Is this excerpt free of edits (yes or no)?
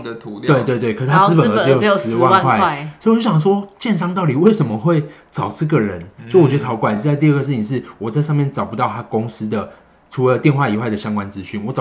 yes